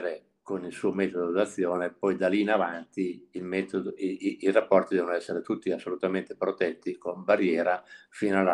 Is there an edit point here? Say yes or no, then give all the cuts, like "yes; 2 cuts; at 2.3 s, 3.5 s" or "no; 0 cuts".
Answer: no; 0 cuts